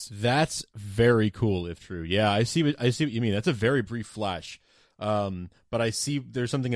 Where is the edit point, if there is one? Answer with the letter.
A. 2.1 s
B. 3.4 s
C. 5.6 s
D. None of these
D